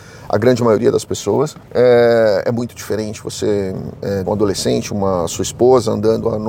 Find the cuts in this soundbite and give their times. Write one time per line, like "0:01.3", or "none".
0:01.7
0:04.2